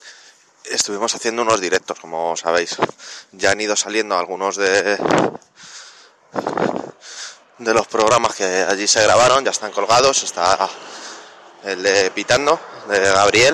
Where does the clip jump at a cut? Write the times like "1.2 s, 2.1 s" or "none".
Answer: none